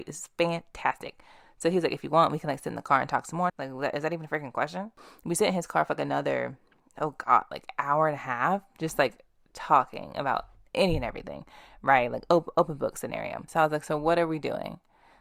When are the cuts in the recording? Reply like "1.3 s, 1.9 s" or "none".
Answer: 3.5 s